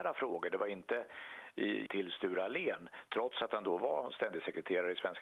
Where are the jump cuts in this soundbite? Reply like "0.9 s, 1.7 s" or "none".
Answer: 1.9 s